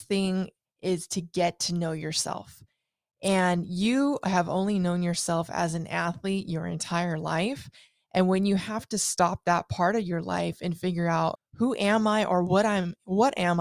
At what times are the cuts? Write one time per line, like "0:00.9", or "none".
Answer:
0:11.4